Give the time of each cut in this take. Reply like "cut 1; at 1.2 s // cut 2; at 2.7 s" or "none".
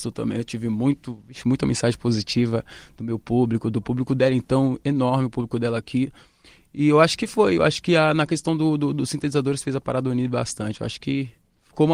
none